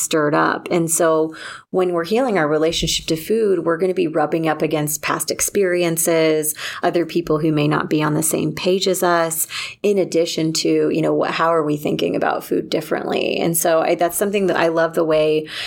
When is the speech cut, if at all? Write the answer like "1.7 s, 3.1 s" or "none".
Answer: none